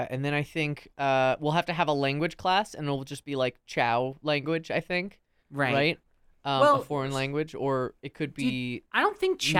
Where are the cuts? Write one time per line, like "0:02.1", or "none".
none

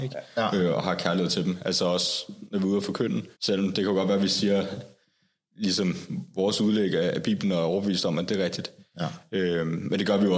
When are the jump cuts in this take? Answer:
0:03.3

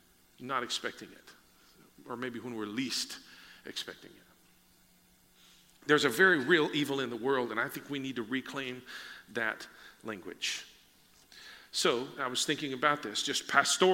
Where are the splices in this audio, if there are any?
0:12.2

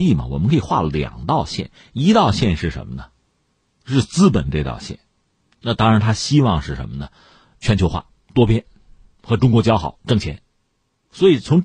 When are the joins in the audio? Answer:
none

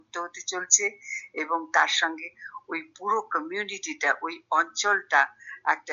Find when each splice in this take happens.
0:02.0

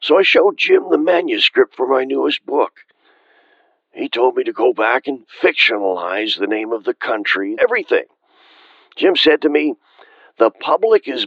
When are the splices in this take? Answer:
0:07.6

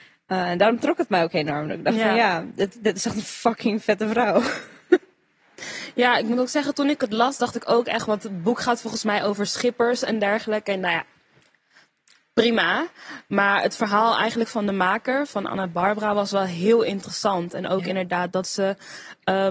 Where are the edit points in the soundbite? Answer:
none

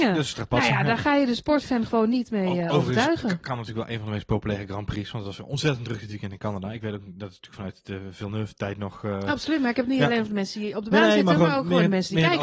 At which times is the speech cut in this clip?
none

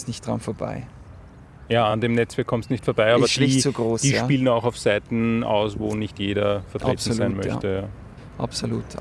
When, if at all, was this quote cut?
none

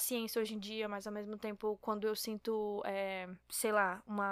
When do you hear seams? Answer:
0:03.4

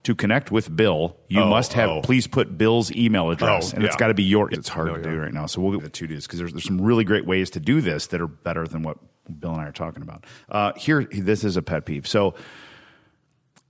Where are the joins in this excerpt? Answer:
0:04.5
0:05.8

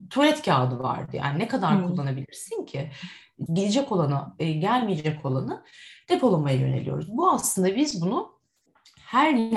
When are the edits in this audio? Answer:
0:03.5

